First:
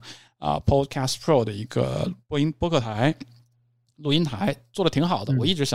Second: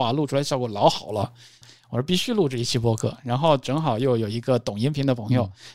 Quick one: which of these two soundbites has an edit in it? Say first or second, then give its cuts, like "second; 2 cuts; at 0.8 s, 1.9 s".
second; 1 cut; at 1.6 s